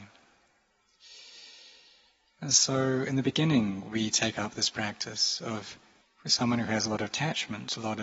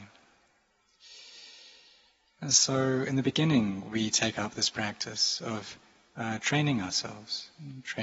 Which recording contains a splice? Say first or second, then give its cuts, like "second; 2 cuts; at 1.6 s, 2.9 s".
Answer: first; 1 cut; at 6.0 s